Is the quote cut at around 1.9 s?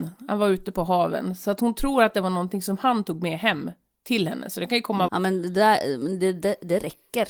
no; 1 cut; at 5.1 s

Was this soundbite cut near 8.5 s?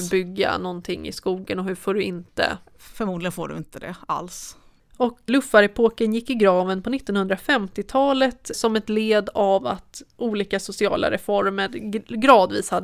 yes; 2 cuts; at 5.3 s, 8.5 s

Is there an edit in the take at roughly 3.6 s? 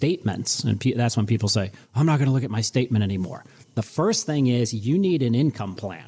yes; 1 cut; at 3.6 s

